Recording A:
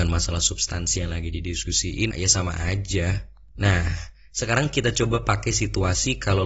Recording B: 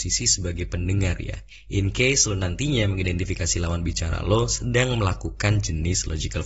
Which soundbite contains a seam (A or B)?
A